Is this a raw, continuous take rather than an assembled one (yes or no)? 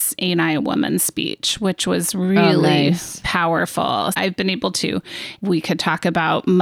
no